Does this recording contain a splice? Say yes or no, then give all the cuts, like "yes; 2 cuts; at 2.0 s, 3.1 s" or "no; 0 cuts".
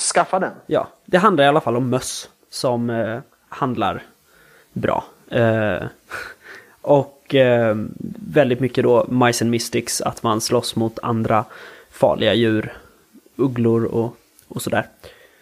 no; 0 cuts